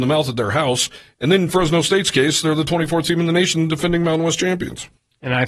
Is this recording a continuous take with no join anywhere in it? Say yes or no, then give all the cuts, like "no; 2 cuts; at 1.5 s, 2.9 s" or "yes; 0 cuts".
yes; 0 cuts